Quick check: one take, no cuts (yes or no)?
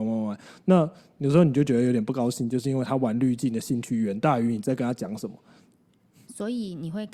yes